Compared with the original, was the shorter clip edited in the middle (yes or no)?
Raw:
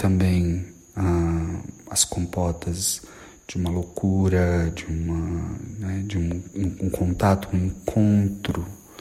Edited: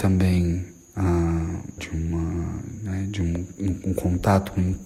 yes